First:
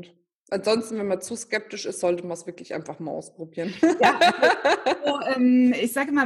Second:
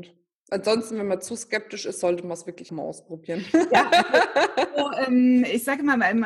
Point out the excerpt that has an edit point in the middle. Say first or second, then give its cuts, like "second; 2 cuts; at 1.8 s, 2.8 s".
second; 1 cut; at 2.7 s